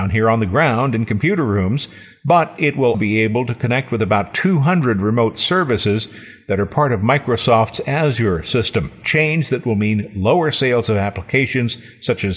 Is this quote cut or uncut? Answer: cut